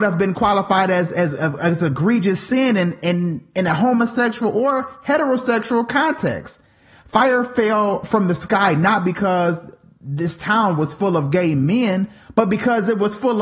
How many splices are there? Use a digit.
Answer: 0